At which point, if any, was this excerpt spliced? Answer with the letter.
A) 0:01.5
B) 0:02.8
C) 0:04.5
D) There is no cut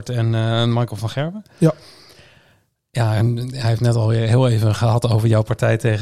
D